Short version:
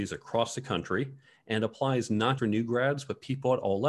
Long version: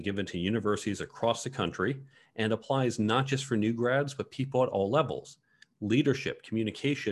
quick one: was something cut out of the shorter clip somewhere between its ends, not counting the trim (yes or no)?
yes